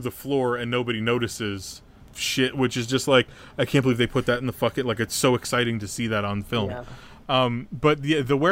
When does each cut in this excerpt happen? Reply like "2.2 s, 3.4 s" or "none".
2.0 s, 7.2 s